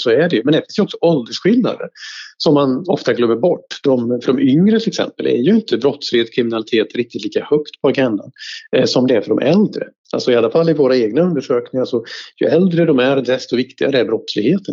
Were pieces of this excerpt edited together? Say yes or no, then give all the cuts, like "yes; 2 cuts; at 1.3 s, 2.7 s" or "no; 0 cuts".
no; 0 cuts